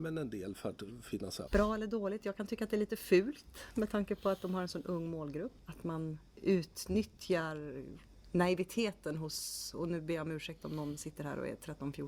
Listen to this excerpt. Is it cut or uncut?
cut